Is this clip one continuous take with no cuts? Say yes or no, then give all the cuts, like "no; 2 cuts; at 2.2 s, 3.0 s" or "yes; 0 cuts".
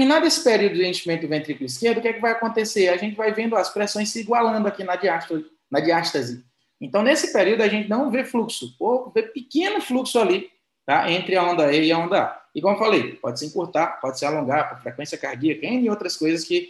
yes; 0 cuts